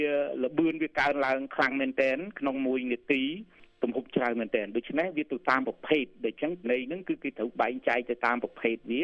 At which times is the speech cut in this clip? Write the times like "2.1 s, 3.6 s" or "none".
6.6 s